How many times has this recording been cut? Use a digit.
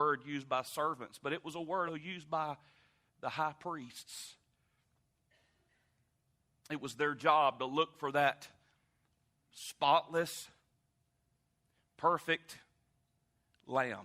1